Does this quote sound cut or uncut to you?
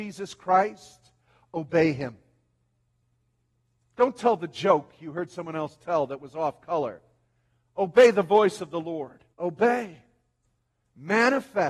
cut